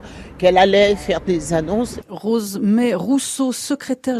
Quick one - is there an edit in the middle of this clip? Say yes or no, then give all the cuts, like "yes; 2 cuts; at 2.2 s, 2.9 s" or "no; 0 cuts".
yes; 1 cut; at 2.0 s